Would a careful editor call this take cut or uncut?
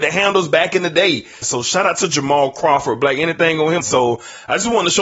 cut